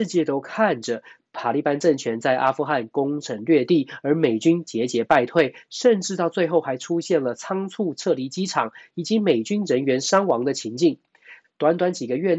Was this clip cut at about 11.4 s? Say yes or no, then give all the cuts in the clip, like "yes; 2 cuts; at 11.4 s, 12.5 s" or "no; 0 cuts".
yes; 1 cut; at 11.4 s